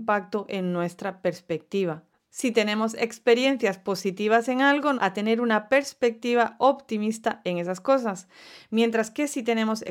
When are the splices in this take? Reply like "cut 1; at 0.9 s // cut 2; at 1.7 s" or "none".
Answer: cut 1; at 4.9 s